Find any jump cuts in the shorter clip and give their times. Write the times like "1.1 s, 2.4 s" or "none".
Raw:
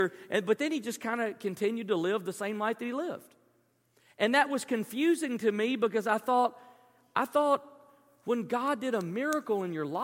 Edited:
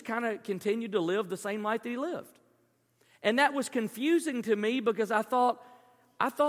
none